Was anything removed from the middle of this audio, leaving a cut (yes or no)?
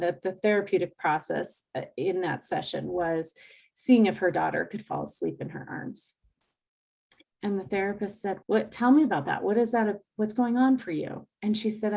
yes